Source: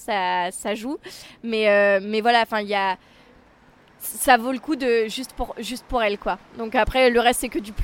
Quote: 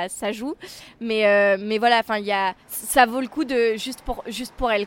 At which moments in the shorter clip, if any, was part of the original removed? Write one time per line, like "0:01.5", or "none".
0:02.6